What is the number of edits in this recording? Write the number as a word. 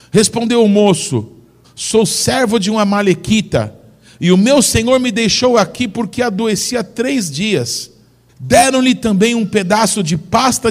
two